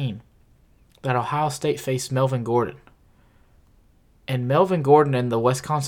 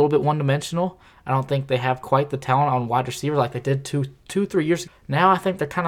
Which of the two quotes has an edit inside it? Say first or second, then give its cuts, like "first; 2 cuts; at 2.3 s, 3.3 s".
second; 1 cut; at 4.9 s